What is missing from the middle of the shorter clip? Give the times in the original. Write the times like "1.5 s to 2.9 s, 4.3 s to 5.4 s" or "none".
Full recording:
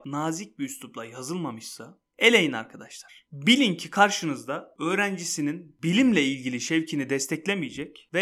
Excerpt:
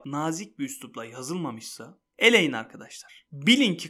none